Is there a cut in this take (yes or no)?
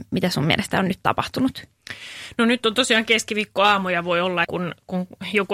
yes